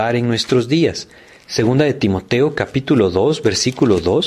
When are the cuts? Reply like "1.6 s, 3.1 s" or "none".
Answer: none

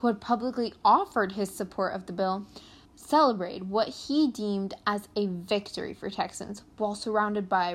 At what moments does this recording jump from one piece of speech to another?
2.8 s

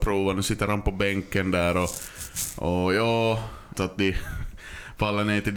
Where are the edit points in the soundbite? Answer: 3.7 s

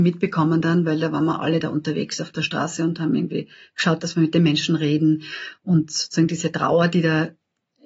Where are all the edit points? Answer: none

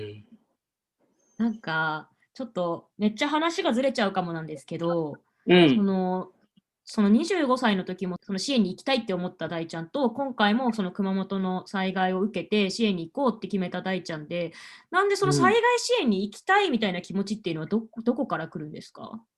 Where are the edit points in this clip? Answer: 8.2 s

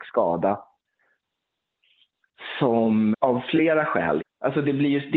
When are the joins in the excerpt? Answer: 3.1 s, 4.2 s

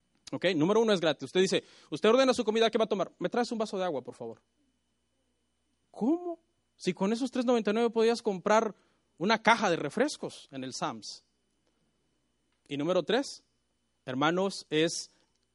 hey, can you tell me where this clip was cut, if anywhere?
5.8 s, 12.5 s

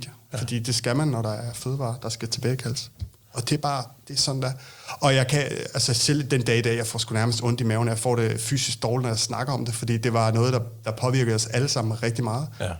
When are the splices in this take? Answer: none

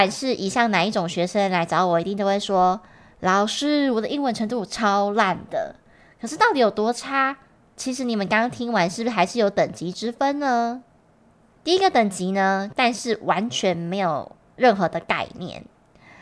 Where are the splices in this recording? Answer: 11.6 s, 12.7 s

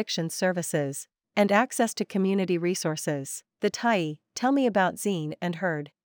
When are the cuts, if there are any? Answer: 3.5 s

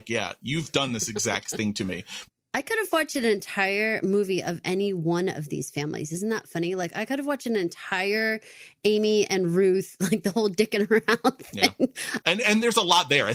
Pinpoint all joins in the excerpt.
12.2 s

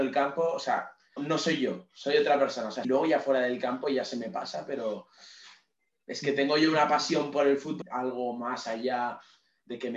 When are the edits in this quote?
1.2 s, 2.8 s, 7.8 s

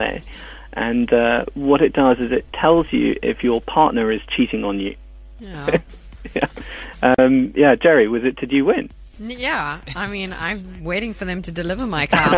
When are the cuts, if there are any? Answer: 5.4 s

